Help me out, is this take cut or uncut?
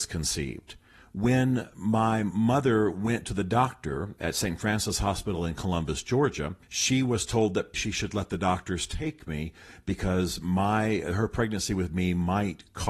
cut